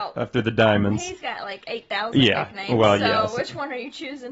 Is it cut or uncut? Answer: uncut